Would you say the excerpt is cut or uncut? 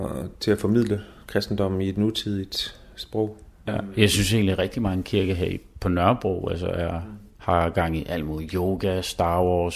cut